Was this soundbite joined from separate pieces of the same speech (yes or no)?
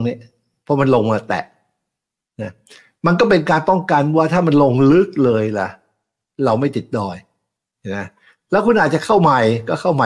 no